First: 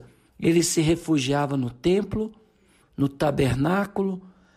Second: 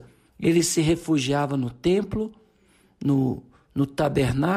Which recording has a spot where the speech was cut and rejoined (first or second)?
first